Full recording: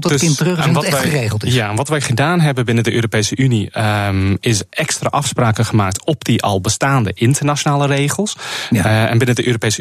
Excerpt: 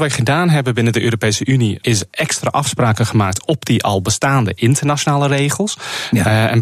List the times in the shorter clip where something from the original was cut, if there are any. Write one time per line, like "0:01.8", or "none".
0:01.8